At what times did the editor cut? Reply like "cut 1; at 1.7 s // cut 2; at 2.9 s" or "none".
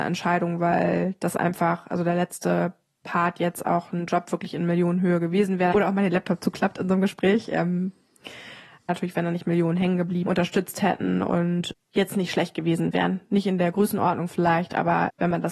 cut 1; at 5.7 s // cut 2; at 8.9 s // cut 3; at 10.3 s